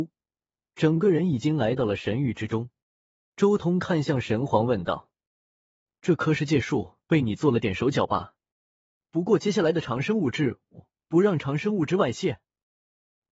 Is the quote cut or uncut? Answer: cut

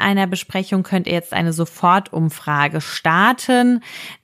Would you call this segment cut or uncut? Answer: uncut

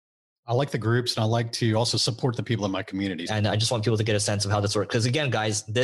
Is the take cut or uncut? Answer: cut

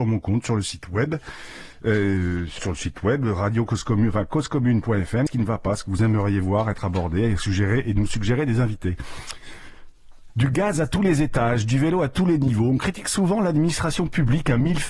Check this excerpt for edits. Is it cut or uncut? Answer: cut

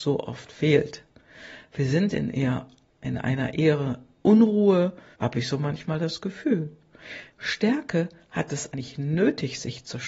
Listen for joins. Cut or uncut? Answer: cut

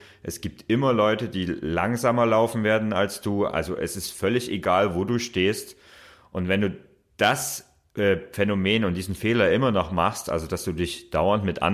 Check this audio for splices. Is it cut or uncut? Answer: uncut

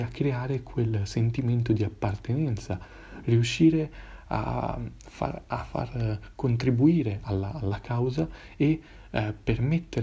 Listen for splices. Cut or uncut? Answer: uncut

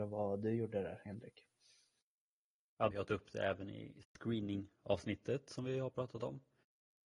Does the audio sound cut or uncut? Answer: cut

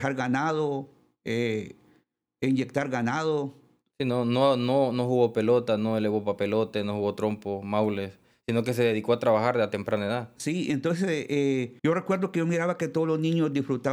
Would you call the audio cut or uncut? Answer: cut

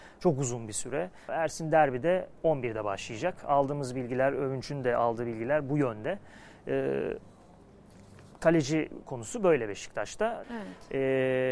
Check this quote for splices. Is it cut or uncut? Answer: cut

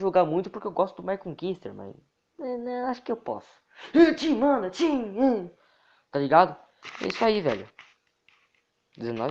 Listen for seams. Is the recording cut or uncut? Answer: uncut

